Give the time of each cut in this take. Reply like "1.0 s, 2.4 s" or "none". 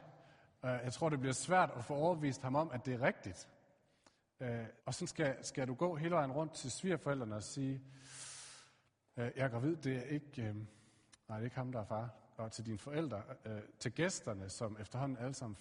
4.8 s